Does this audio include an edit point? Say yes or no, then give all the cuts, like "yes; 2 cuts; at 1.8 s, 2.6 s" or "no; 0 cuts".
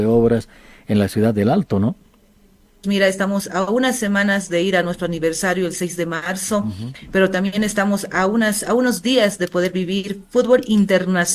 yes; 1 cut; at 2.8 s